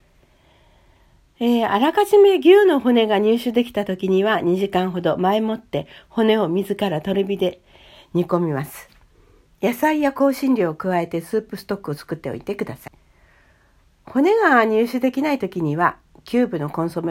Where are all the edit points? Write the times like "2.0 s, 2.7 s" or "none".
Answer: none